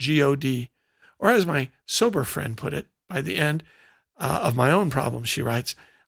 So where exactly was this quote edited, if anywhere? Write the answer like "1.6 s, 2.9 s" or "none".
none